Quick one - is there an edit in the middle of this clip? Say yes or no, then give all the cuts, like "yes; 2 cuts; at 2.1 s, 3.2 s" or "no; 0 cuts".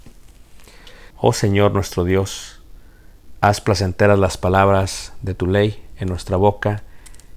yes; 1 cut; at 1.1 s